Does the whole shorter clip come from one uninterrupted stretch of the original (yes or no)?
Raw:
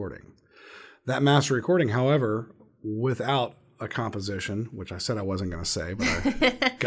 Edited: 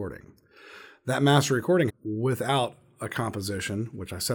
no